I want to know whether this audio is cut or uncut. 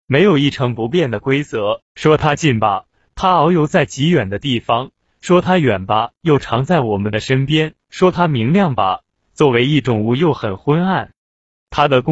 cut